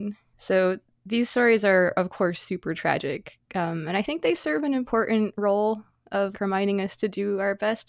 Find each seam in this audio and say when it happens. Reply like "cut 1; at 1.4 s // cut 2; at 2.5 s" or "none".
cut 1; at 6.3 s

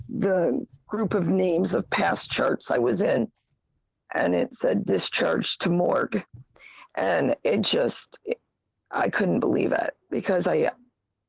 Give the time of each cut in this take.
cut 1; at 8.2 s

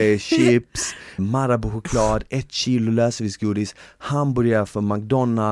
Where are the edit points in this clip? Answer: cut 1; at 1.2 s

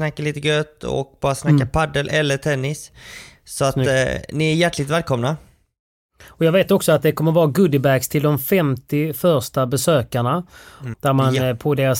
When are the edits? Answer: cut 1; at 10.9 s

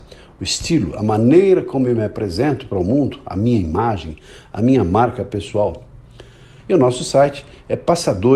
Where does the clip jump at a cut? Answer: cut 1; at 6.6 s

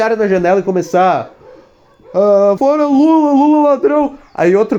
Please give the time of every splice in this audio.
cut 1; at 2.6 s

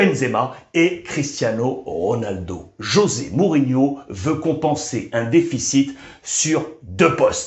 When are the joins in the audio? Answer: none

